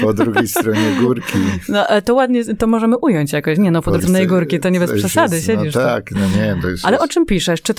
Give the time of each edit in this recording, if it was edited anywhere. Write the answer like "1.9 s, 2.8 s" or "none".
4.0 s